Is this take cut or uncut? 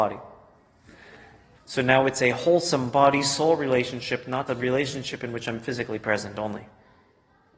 cut